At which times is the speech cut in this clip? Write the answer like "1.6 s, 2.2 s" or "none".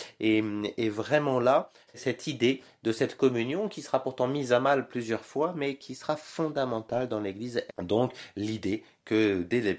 1.9 s, 7.7 s